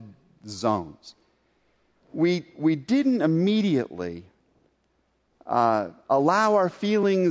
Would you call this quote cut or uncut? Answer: uncut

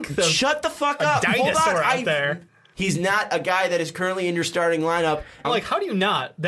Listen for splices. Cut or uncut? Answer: cut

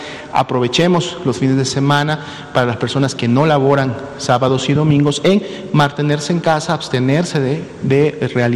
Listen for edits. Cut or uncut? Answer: uncut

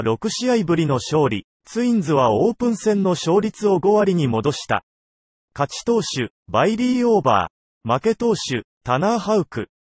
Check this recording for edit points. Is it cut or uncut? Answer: cut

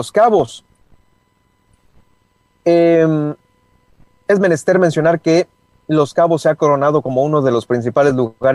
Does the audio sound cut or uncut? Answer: uncut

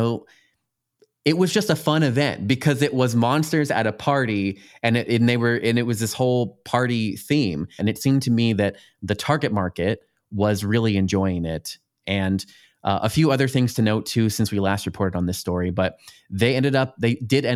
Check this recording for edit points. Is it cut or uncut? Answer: cut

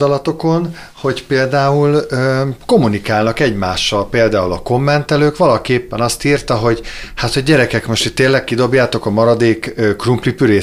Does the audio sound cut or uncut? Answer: uncut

